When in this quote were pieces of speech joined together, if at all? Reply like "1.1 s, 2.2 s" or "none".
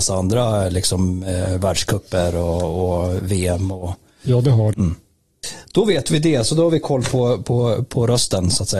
4.7 s